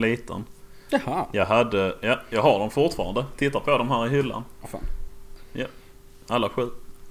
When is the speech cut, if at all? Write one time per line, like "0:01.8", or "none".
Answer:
0:04.6